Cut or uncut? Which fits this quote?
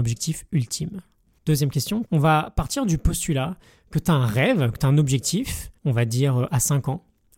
cut